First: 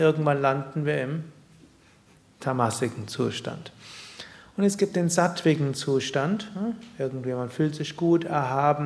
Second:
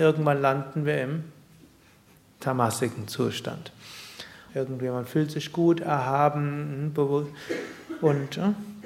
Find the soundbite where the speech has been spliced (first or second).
second